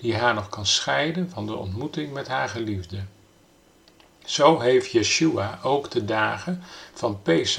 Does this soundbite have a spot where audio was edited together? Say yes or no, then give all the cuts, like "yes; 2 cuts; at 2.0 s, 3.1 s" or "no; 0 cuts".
no; 0 cuts